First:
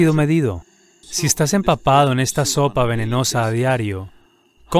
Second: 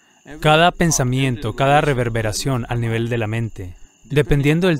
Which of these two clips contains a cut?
first; 1 cut; at 1.0 s

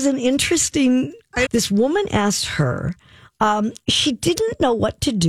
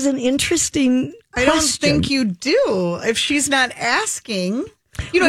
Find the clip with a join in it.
first; 1 cut; at 1.4 s

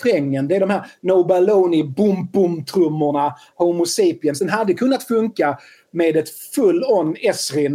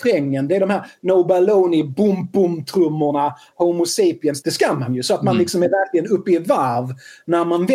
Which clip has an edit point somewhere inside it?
second; 1 cut; at 4.4 s

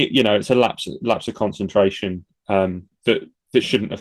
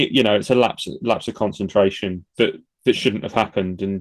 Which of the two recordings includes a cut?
second; 1 cut; at 2.3 s

